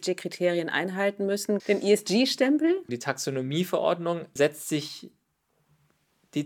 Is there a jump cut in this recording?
yes; 3 cuts; at 1.6 s, 2.9 s, 4.4 s

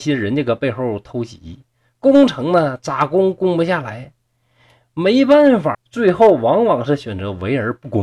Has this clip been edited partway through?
yes; 1 cut; at 5.7 s

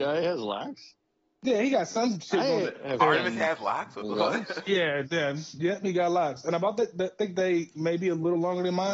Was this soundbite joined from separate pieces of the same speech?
no; 0 cuts

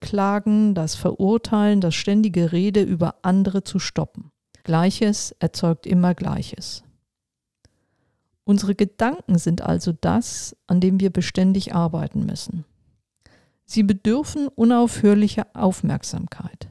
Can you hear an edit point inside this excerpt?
yes; 1 cut; at 4.6 s

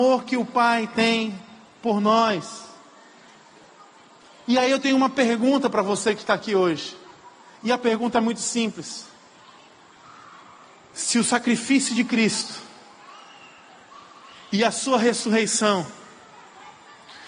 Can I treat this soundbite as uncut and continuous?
yes; 0 cuts

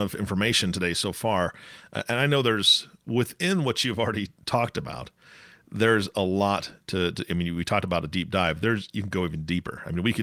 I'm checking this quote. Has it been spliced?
no; 0 cuts

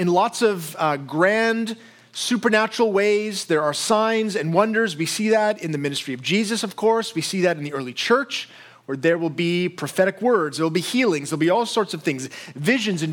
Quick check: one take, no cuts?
yes; 0 cuts

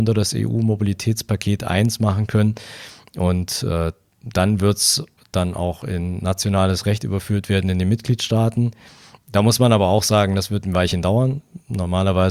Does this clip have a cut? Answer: no; 0 cuts

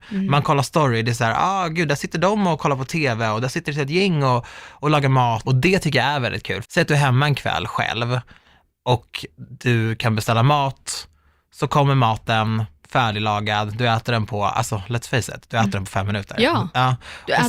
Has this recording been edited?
yes; 2 cuts; at 5.4 s, 6.6 s

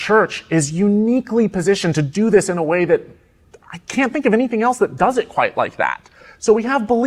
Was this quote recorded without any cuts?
yes; 0 cuts

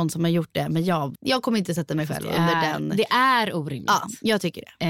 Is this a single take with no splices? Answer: no; 1 cut; at 1.1 s

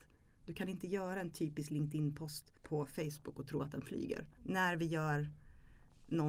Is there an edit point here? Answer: yes; 2 cuts; at 2.6 s, 4.4 s

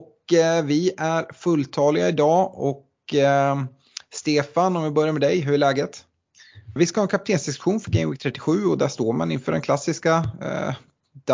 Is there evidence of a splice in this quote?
yes; 1 cut; at 6.8 s

